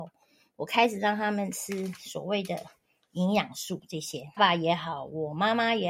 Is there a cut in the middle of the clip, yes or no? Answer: yes